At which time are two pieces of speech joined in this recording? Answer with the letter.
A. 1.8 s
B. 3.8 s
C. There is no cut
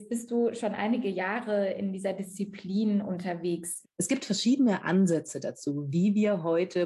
B